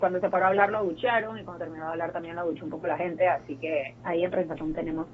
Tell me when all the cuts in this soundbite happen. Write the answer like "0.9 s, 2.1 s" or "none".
4.0 s

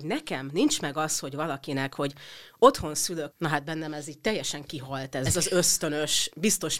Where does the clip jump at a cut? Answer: 3.3 s, 5.3 s

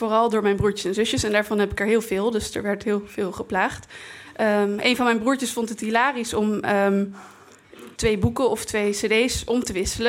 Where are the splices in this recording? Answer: 7.9 s

